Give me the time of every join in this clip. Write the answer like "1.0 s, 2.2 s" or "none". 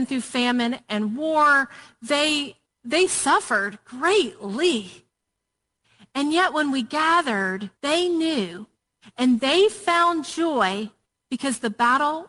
7.8 s